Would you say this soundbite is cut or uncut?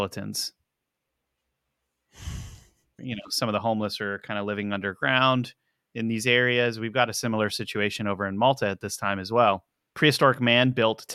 cut